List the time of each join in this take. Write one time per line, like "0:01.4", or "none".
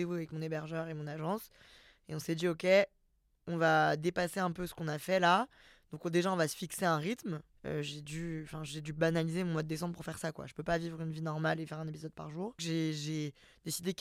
0:07.5
0:12.6